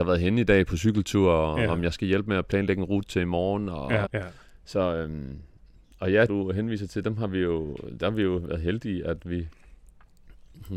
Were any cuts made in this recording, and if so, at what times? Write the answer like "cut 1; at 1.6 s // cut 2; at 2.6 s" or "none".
cut 1; at 4.1 s // cut 2; at 6.3 s